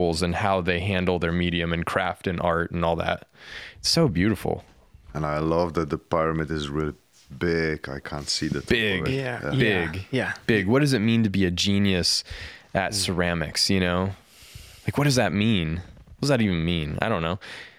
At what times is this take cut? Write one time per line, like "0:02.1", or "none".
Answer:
none